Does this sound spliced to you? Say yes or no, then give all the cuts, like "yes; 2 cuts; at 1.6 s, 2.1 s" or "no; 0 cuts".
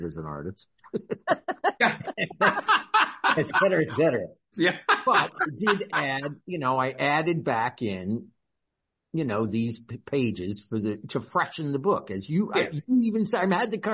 yes; 1 cut; at 4.5 s